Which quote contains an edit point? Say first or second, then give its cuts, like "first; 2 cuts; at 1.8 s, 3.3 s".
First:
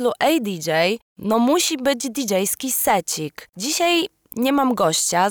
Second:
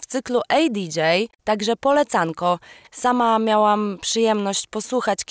second; 2 cuts; at 1.3 s, 2.8 s